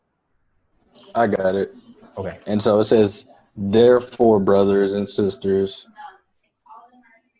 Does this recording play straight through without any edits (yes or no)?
no